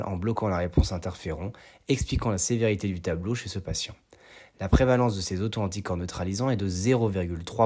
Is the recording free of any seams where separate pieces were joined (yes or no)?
yes